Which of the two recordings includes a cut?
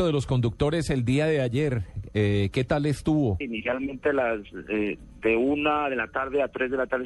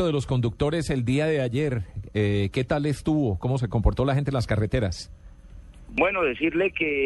first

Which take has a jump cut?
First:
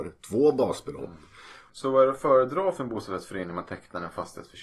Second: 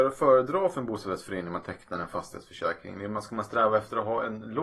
first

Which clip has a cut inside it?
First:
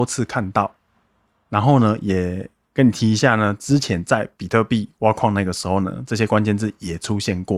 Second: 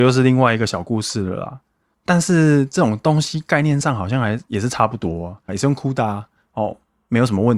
second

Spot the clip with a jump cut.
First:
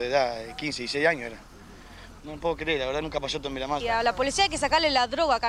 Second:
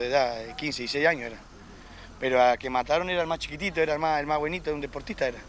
first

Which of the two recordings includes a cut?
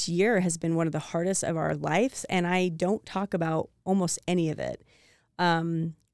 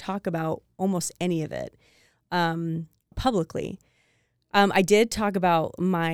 second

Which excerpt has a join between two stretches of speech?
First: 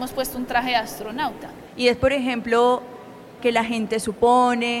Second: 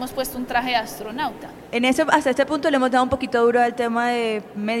first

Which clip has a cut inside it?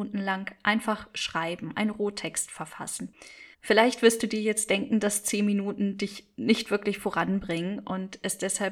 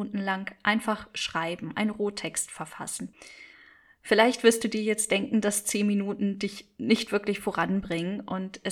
first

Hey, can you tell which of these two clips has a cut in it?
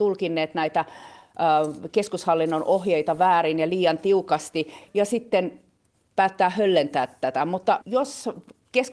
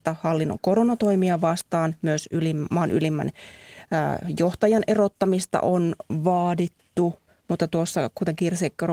first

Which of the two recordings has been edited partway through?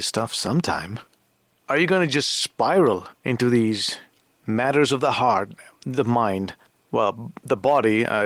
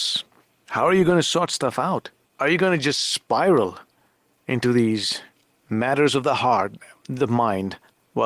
first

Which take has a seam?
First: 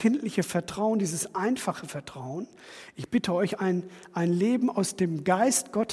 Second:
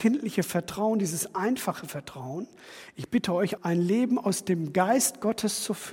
second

